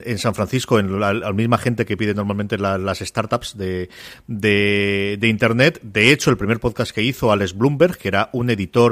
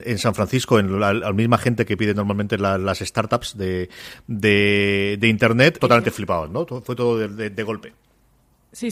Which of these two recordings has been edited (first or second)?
second